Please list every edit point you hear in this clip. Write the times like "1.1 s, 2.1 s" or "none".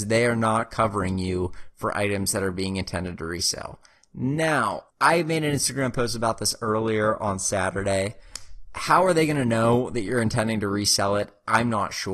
4.9 s